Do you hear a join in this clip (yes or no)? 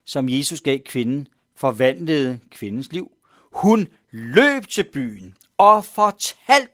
no